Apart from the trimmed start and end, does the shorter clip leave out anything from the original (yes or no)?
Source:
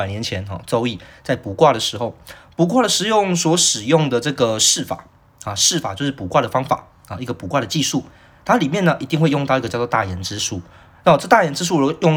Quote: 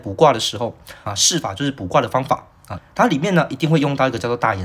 yes